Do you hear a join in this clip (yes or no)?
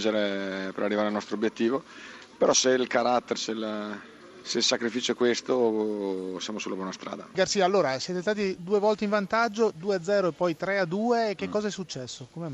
yes